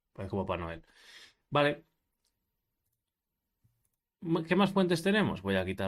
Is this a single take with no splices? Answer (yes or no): yes